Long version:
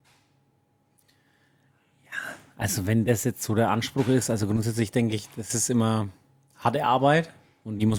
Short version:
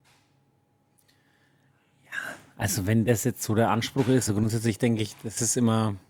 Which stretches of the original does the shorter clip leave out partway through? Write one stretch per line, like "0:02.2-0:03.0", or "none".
0:04.3-0:04.4